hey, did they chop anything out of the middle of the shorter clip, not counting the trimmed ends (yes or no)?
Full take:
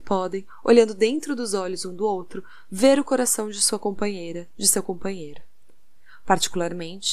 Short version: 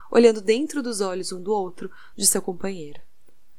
yes